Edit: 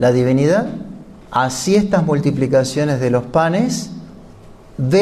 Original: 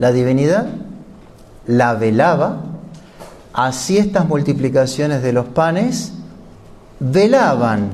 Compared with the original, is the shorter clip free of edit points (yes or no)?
no